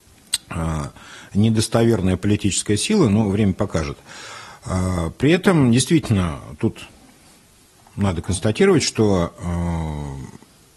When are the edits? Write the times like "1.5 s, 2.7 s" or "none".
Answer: none